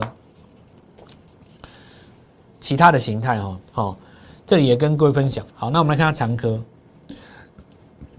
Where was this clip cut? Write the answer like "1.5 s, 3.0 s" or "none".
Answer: 3.6 s